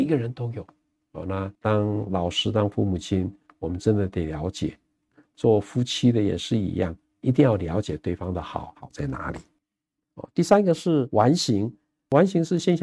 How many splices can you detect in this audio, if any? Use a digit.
0